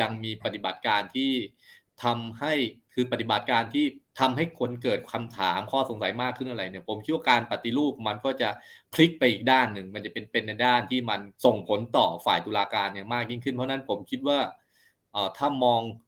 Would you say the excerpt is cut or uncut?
cut